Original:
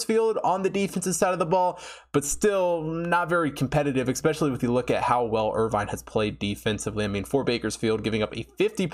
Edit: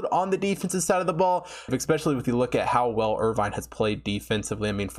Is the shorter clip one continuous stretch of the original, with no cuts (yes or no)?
no